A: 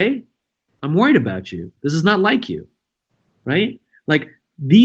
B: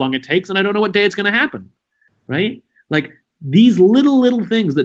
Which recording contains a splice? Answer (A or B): B